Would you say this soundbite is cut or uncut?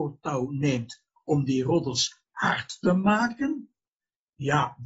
uncut